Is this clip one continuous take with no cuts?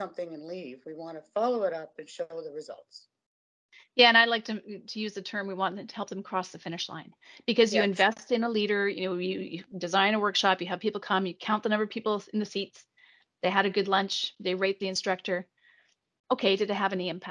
yes; 0 cuts

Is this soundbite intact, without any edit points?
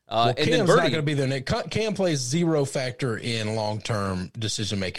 yes; 0 cuts

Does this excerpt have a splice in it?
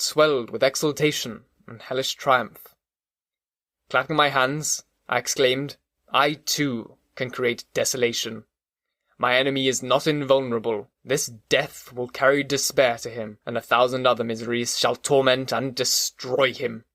yes; 2 cuts; at 10.9 s, 13.4 s

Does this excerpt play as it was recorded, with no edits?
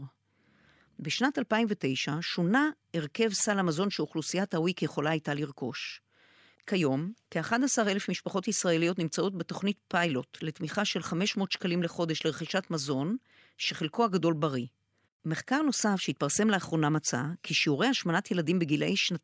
no; 2 cuts; at 6.6 s, 15.0 s

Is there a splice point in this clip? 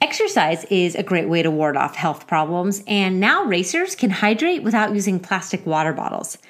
no; 0 cuts

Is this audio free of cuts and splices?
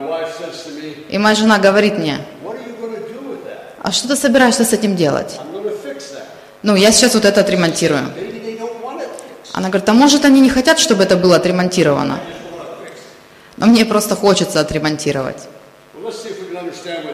yes; 0 cuts

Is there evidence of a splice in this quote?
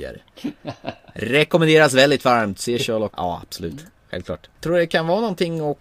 yes; 2 cuts; at 3.1 s, 4.6 s

